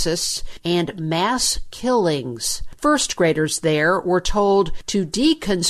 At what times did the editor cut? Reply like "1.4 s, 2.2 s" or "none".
2.8 s